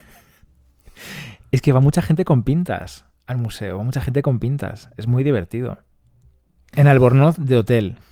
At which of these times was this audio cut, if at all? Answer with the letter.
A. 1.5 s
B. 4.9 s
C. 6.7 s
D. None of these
C